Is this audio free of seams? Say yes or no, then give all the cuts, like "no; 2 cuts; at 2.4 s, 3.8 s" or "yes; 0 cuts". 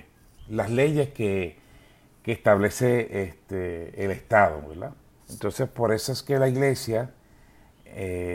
no; 1 cut; at 5.2 s